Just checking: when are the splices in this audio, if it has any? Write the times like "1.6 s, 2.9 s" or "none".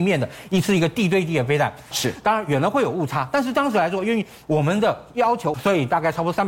1.9 s, 5.5 s